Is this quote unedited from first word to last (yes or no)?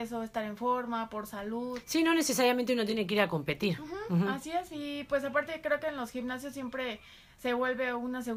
yes